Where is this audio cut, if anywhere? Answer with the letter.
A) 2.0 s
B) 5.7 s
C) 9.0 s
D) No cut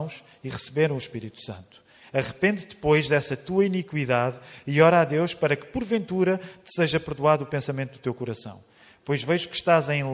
A